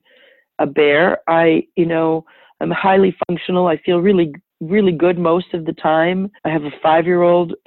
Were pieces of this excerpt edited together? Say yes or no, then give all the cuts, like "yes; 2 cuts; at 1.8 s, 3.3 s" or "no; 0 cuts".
yes; 1 cut; at 6.4 s